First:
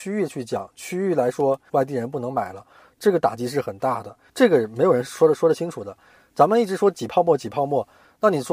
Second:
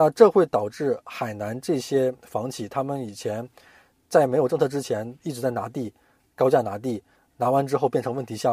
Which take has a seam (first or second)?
first